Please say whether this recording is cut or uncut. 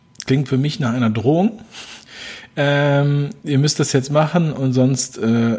uncut